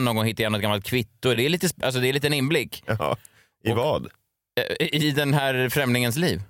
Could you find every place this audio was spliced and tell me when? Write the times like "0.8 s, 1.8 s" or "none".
none